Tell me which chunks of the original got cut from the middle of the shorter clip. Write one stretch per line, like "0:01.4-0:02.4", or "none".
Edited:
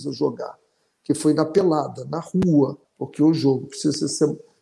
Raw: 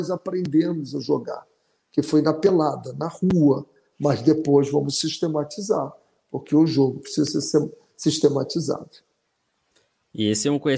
0:03.7-0:06.2

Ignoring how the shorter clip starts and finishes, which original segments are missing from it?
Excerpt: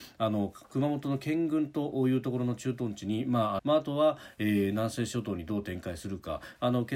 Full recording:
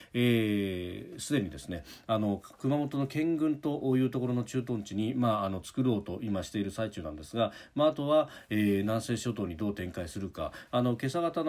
0:05.5-0:07.7

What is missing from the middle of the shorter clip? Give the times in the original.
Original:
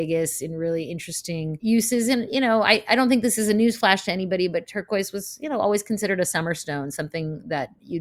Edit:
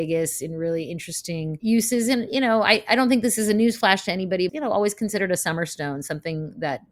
0:04.5-0:05.4

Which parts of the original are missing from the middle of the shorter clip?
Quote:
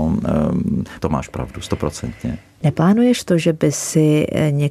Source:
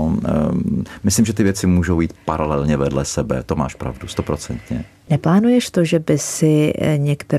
0:01.0-0:03.5

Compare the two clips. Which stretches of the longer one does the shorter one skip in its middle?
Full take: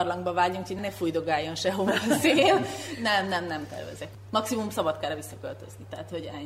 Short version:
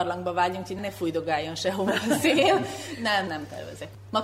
0:03.3-0:03.5

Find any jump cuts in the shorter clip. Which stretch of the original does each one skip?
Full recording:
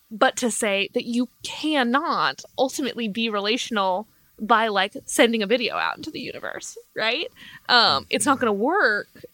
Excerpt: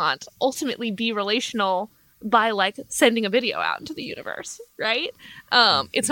none

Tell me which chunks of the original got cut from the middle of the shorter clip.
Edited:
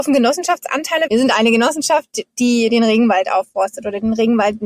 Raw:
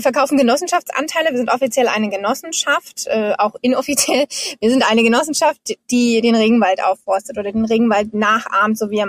0:01.3-0:04.6

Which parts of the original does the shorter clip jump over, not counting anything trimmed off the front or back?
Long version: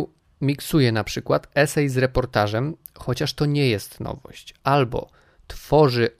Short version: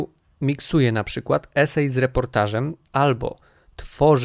0:02.9-0:04.6

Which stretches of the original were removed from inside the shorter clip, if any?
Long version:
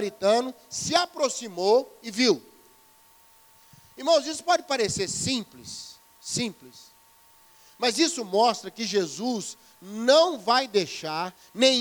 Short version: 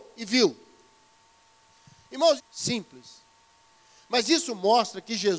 0:04.2-0:06.1

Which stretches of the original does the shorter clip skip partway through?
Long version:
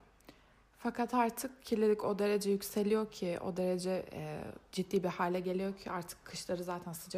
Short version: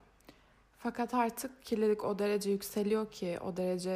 none

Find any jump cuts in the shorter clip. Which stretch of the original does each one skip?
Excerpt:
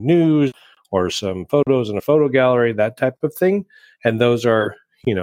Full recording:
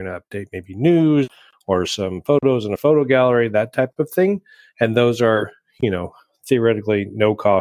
none

